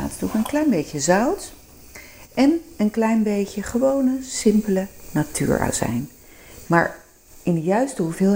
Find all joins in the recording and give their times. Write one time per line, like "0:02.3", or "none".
0:06.6